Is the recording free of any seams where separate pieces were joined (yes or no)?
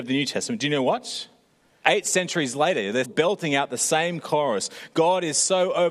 no